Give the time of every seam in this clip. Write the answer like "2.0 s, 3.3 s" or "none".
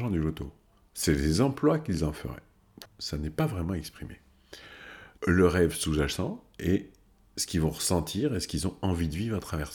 2.9 s, 5.2 s